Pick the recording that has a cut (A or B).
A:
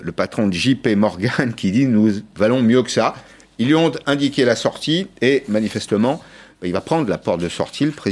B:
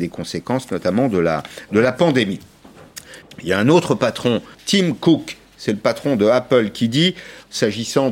B